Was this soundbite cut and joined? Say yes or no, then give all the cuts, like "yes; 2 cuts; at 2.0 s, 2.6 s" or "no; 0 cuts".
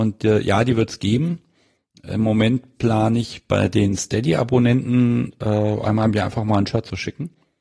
no; 0 cuts